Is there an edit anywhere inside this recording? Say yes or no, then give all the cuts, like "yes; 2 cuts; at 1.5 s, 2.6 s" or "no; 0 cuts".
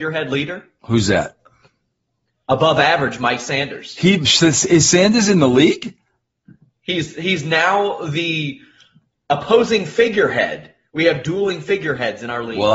no; 0 cuts